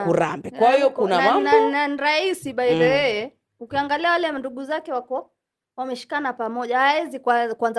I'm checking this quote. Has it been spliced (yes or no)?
no